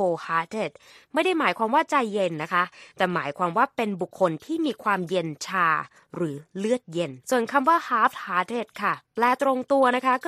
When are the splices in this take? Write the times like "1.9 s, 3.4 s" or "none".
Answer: 4.1 s, 7.2 s